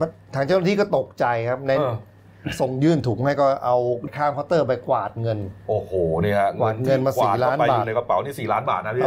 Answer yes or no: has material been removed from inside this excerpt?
yes